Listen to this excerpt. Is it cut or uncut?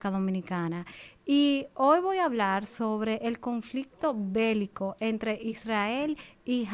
uncut